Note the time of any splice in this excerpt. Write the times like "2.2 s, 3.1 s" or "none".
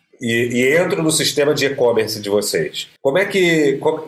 3.0 s